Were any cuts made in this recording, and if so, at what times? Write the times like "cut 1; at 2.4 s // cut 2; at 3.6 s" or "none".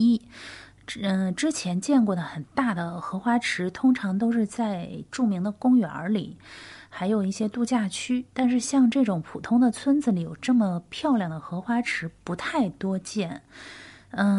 none